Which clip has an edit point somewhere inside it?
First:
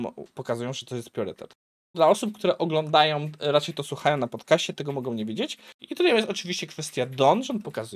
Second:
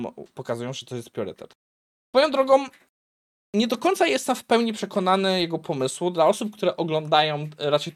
first; 2 cuts; at 1.9 s, 5.8 s

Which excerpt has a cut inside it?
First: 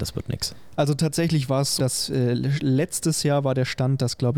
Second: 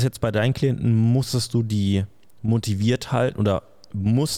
first; 1 cut; at 1.8 s

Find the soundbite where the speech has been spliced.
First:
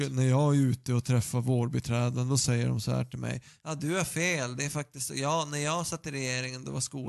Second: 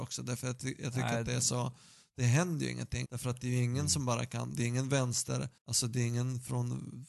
second; 2 cuts; at 3.0 s, 5.6 s

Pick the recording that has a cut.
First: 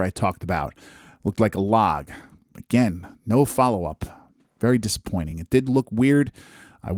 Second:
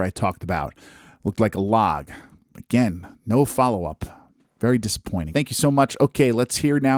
second; 1 cut; at 5.3 s

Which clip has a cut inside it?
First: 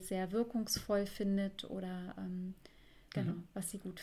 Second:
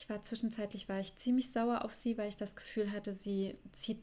first; 1 cut; at 3.1 s

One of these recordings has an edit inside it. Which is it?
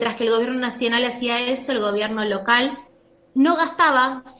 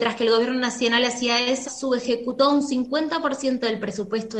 second; 1 cut; at 1.6 s

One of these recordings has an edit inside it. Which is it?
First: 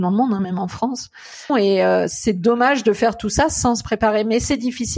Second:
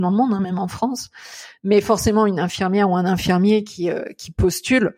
first; 1 cut; at 1.5 s

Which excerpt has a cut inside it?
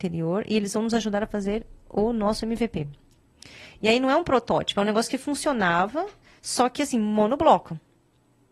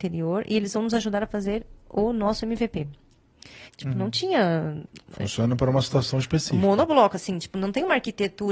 second; 1 cut; at 3.7 s

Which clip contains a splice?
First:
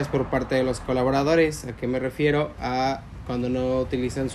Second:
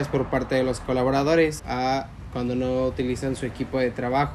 second; 1 cut; at 1.6 s

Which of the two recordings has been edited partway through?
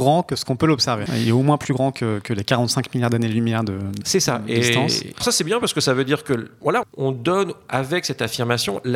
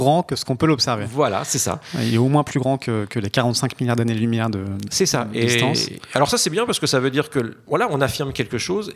first; 3 cuts; at 1.1 s, 5.2 s, 6.8 s

